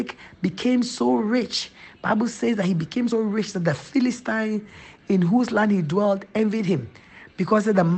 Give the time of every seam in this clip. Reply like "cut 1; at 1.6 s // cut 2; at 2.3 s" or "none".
cut 1; at 3.1 s